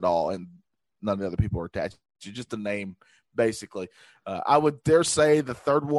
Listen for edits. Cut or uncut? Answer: uncut